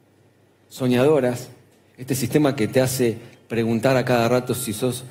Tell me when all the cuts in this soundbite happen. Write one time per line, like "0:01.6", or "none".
0:01.8